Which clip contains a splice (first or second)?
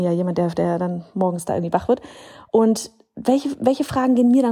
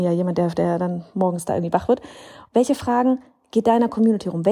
second